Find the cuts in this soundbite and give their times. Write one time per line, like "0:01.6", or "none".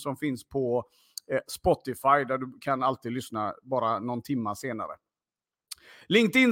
none